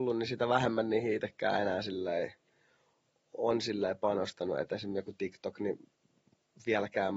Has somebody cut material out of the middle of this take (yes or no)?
no